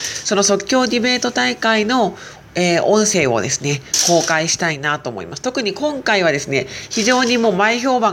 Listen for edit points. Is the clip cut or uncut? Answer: uncut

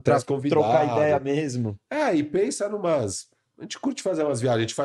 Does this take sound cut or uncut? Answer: uncut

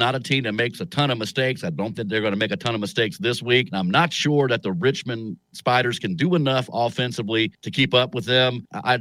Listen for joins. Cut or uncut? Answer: uncut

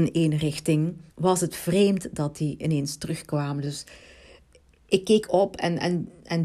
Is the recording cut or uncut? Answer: cut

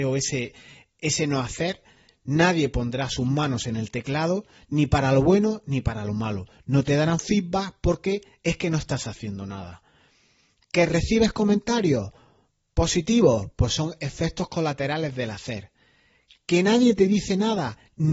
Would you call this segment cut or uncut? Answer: uncut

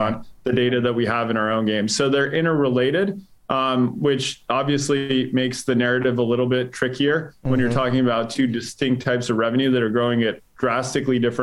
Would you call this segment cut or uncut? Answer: uncut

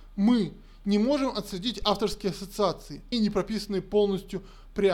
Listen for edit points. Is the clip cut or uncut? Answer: cut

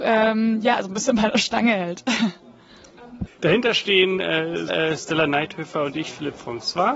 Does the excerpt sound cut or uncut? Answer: cut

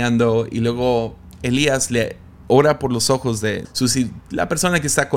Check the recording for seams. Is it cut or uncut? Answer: cut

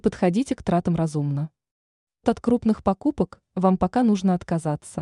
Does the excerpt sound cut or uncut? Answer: cut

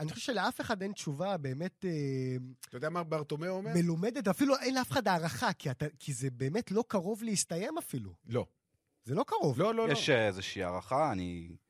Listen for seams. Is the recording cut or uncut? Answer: uncut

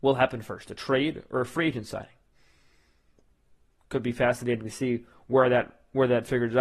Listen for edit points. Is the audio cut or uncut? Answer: uncut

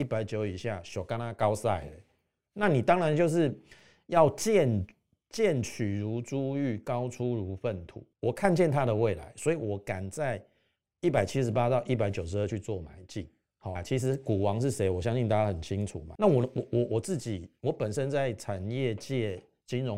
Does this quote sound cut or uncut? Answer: cut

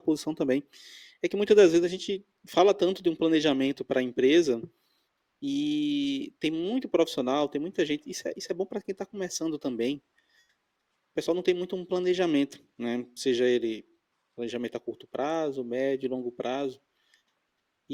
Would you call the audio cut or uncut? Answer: uncut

